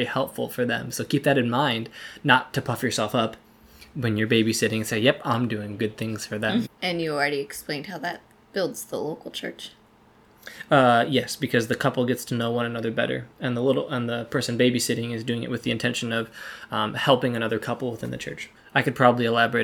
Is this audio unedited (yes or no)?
no